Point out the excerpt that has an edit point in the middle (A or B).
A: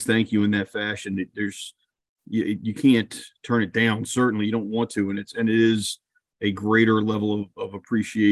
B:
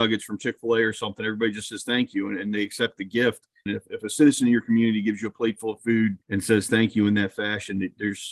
B